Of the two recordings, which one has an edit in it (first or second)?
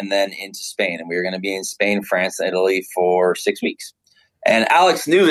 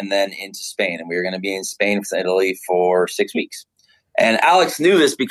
second